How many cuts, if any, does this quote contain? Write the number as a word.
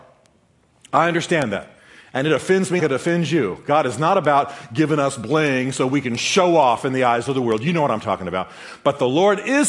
one